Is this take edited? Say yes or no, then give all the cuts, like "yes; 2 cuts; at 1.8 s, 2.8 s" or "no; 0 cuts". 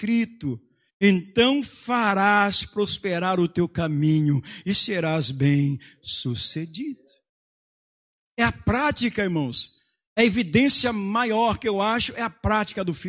no; 0 cuts